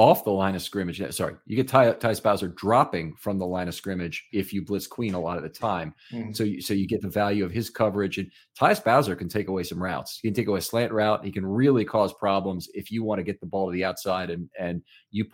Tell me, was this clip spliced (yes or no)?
no